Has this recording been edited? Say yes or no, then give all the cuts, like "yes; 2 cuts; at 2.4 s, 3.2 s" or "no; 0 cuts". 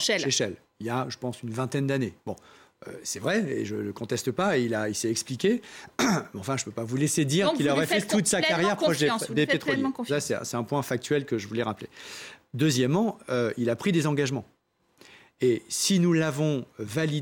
no; 0 cuts